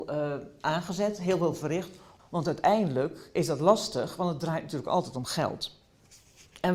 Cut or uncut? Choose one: cut